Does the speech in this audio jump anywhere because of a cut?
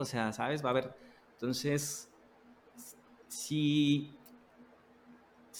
no; 0 cuts

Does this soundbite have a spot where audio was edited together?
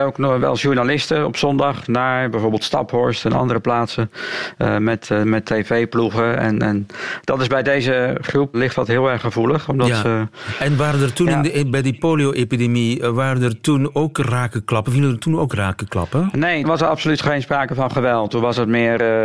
yes; 2 cuts; at 8.5 s, 16.6 s

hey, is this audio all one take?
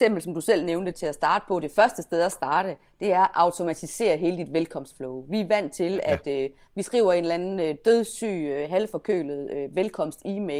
no; 1 cut; at 0.9 s

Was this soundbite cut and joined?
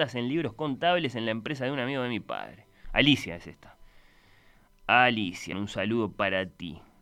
yes; 2 cuts; at 2.8 s, 5.5 s

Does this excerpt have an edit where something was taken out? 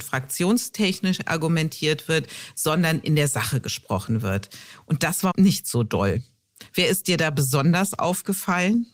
no; 0 cuts

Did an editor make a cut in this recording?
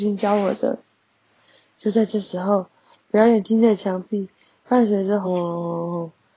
yes; 1 cut; at 5.2 s

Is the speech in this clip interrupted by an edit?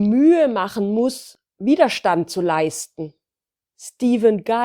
no; 0 cuts

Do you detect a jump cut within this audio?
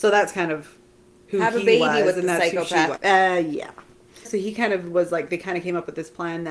yes; 2 cuts; at 3.0 s, 4.2 s

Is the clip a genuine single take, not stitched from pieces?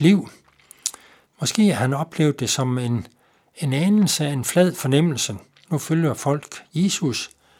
no; 2 cuts; at 1.2 s, 5.7 s

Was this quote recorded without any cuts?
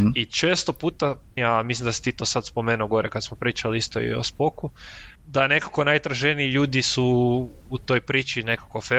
no; 2 cuts; at 1.4 s, 5.2 s

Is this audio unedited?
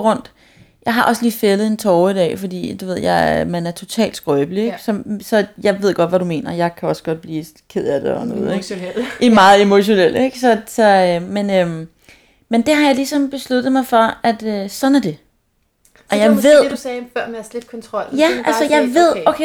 yes; 0 cuts

